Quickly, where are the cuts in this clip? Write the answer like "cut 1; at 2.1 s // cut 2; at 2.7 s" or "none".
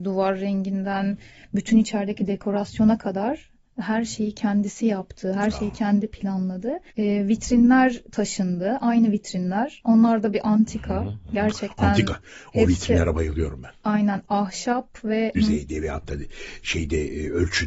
cut 1; at 6.9 s // cut 2; at 15.4 s